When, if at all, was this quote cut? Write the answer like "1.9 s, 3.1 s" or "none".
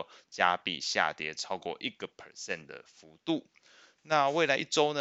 none